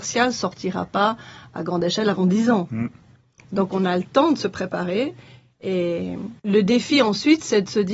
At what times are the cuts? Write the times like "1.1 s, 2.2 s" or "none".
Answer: 6.4 s